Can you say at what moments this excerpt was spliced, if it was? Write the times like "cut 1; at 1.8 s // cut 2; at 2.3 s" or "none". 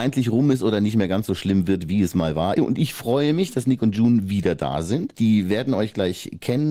cut 1; at 2.6 s // cut 2; at 5.1 s